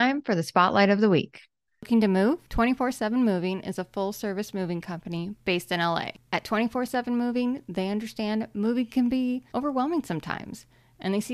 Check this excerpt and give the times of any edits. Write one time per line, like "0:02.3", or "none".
none